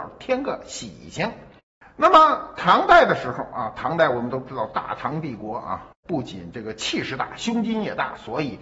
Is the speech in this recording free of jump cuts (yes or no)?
yes